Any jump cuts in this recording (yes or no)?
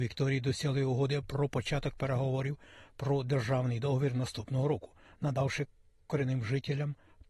no